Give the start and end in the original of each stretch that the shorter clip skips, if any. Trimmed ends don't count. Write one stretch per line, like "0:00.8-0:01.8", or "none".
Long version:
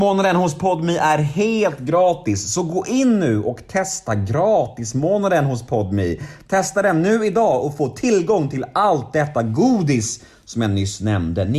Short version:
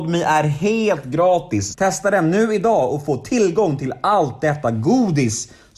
0:02.5-0:06.4